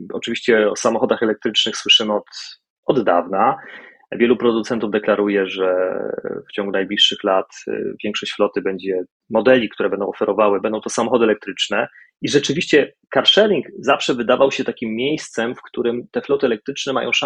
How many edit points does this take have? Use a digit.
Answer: 1